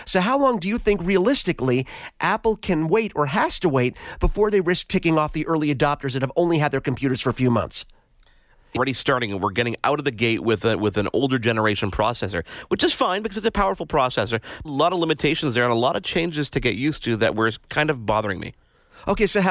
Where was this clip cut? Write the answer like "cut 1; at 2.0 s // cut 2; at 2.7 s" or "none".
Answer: cut 1; at 8.8 s // cut 2; at 14.6 s